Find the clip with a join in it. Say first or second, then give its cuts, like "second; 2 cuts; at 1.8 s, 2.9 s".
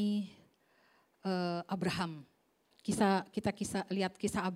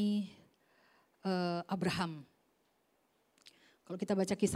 first; 1 cut; at 2.7 s